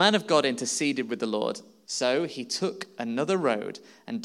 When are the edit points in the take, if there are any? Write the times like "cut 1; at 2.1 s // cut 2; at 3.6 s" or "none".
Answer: cut 1; at 1.9 s